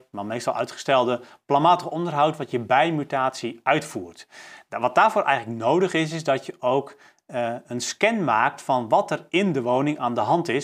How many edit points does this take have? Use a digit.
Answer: 0